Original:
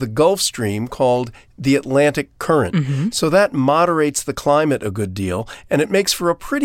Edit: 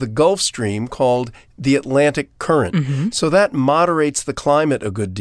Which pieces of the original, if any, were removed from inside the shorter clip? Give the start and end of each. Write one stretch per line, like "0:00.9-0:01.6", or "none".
none